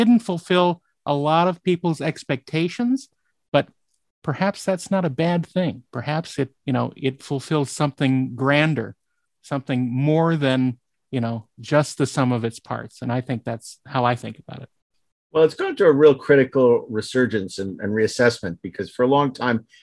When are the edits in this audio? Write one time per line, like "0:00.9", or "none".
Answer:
0:06.6